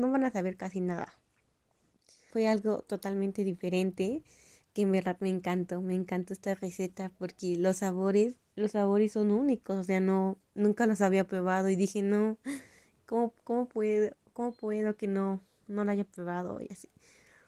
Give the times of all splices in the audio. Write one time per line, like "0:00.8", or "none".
0:02.3